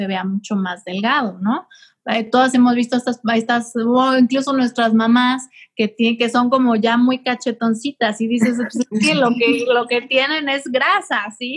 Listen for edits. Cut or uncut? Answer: uncut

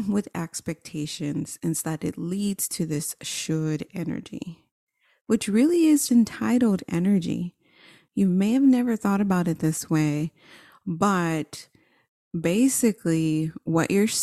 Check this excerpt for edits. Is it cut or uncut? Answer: cut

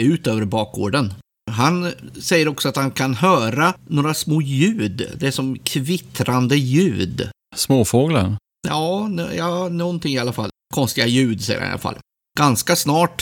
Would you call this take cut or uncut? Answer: uncut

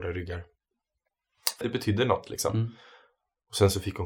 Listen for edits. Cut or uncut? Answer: cut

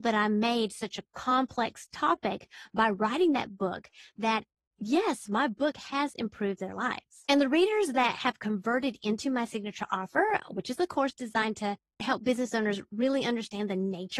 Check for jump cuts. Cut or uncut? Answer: uncut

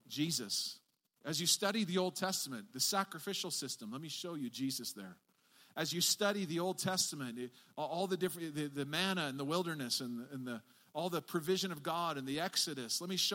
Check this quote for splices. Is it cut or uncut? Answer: uncut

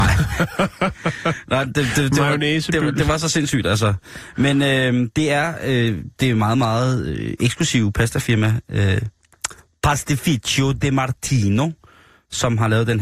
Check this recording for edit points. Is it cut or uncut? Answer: uncut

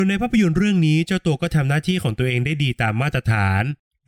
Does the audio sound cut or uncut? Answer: uncut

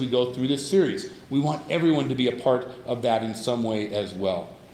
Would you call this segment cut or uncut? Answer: uncut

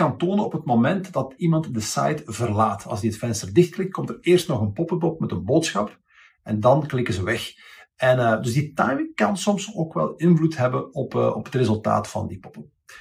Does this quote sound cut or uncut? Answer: uncut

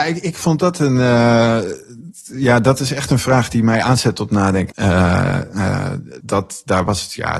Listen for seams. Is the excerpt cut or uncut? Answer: cut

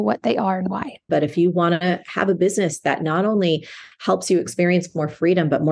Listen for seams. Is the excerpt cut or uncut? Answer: cut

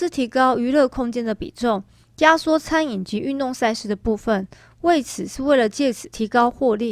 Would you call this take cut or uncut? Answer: uncut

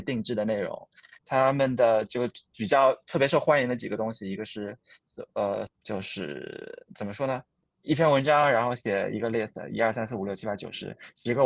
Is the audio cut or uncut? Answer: cut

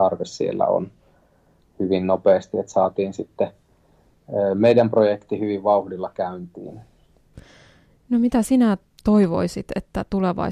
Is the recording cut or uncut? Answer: uncut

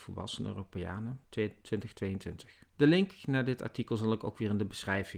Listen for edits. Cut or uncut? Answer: cut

